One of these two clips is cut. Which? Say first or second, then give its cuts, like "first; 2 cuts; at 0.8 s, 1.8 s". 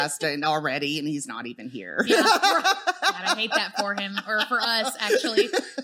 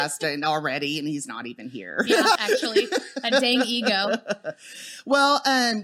second; 1 cut; at 2.4 s